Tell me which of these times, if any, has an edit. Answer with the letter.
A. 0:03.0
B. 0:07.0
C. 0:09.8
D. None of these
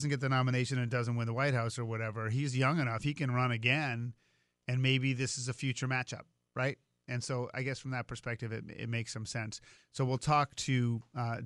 C